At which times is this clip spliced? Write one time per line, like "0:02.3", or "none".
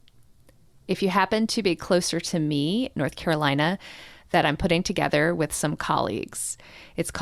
0:02.9

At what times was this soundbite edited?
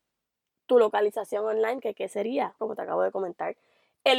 0:02.6

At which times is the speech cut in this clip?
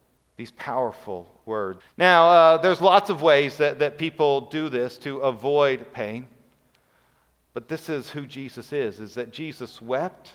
0:01.8
0:07.5

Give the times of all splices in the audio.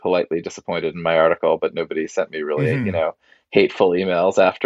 none

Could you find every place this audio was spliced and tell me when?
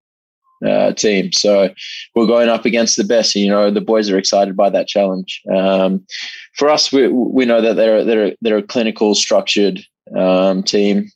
none

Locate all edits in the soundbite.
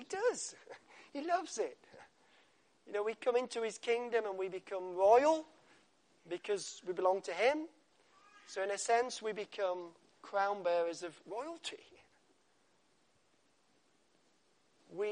none

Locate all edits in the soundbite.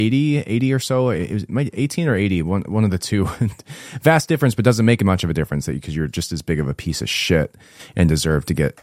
none

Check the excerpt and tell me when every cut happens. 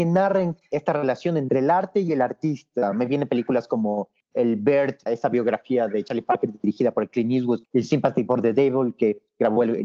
0:05.1
0:07.6

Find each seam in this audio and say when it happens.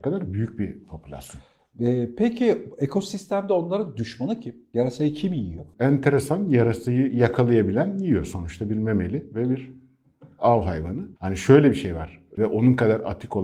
0:11.2
0:12.3

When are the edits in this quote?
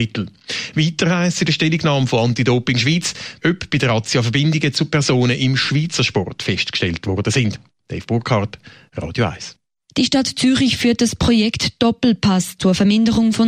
0:03.4

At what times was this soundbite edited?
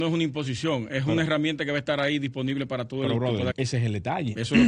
0:03.5

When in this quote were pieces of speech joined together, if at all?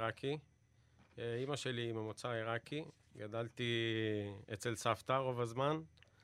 none

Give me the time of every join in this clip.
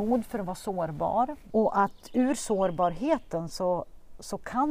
0:01.5

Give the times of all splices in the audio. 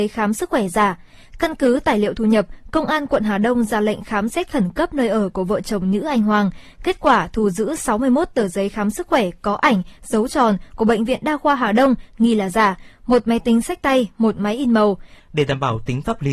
0:15.2

